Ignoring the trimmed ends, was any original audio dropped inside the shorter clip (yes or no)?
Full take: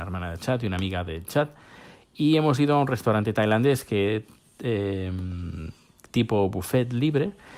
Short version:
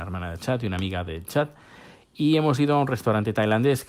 no